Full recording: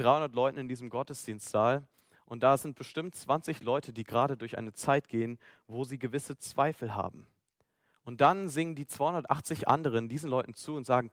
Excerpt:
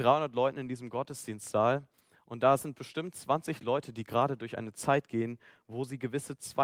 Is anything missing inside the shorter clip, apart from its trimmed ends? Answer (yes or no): no